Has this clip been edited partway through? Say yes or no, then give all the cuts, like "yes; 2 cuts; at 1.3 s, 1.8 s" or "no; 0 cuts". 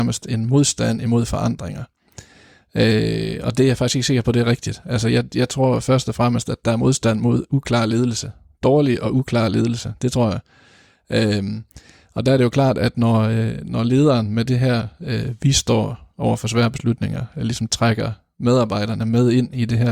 no; 0 cuts